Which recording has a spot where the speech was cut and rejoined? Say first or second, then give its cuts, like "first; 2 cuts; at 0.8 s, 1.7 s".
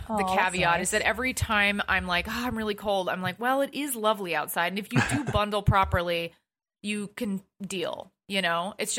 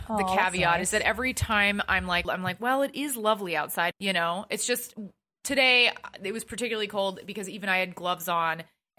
second; 2 cuts; at 2.2 s, 3.9 s